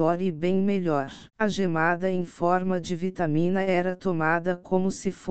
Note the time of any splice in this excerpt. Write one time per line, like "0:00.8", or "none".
0:01.3